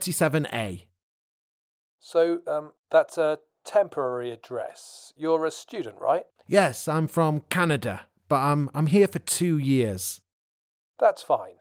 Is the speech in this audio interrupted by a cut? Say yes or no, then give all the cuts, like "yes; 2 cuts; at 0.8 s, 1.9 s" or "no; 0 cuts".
no; 0 cuts